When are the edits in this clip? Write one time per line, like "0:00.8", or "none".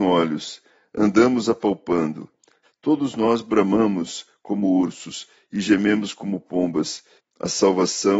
0:02.6
0:07.2